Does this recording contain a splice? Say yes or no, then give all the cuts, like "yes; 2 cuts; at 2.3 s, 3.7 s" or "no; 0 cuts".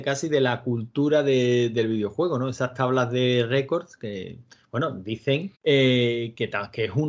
yes; 1 cut; at 5.6 s